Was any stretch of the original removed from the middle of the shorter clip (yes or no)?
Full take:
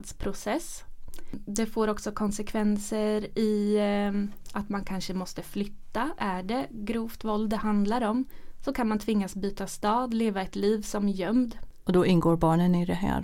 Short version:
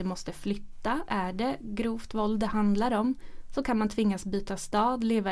no